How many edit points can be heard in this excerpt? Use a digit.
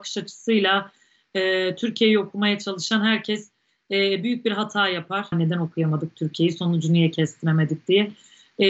1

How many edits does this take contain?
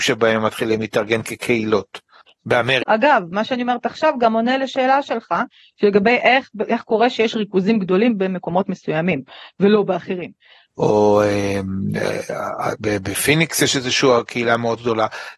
2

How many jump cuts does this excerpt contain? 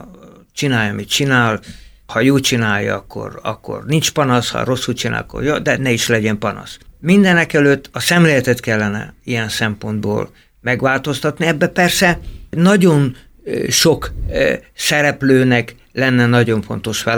1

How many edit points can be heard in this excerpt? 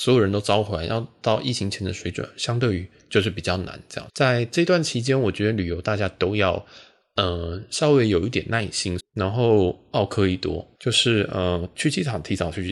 3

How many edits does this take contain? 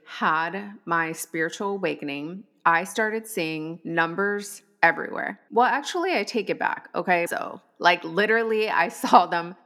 2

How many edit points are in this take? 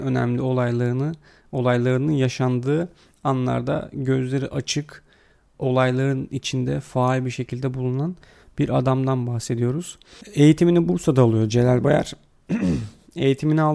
0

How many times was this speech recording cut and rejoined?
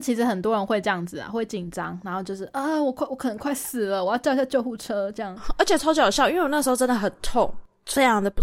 0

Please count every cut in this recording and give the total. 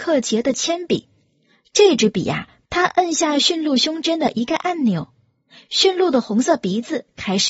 1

